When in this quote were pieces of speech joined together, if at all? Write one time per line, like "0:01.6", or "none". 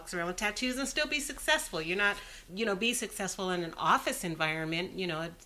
0:02.5